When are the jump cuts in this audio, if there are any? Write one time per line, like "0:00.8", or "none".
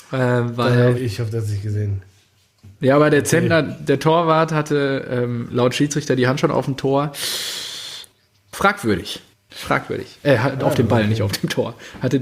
0:01.0